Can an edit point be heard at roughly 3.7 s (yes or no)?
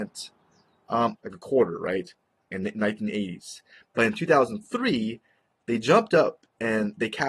no